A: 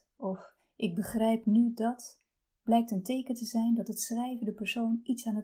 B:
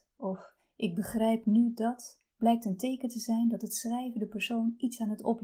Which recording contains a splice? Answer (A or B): B